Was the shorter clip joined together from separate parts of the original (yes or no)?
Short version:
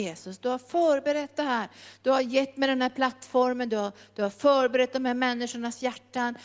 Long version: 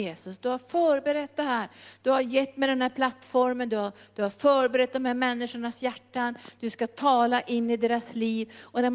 no